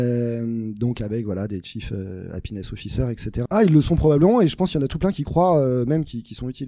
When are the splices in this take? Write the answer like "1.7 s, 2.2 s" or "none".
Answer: 3.5 s